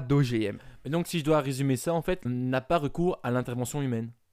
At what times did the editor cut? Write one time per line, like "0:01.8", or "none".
0:02.3

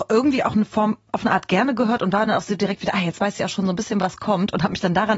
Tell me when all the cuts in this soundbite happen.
none

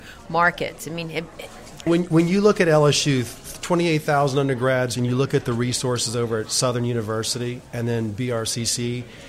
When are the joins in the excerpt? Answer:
0:01.9
0:04.9

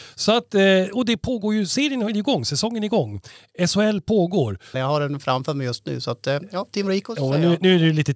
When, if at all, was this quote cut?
0:04.7

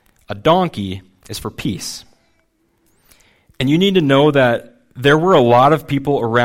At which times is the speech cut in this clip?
none

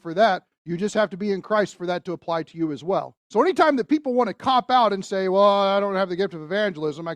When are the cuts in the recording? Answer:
0:03.2

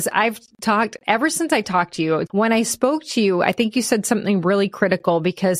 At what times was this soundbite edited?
0:02.3

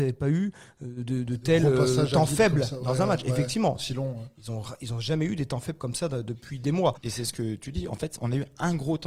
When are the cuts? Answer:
0:07.0

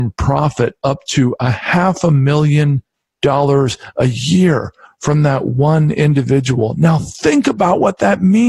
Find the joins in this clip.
none

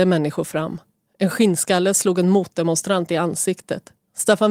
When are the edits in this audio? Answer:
none

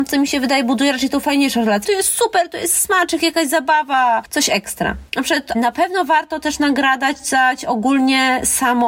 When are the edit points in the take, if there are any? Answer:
0:01.8
0:05.5

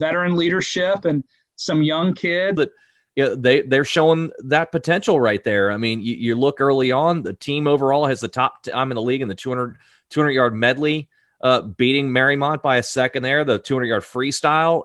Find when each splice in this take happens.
0:02.6

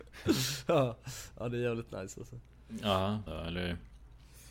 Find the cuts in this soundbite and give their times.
0:03.3

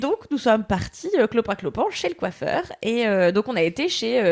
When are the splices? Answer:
none

